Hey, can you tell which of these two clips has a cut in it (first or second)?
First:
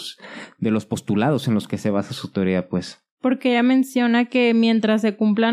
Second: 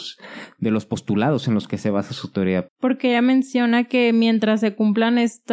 second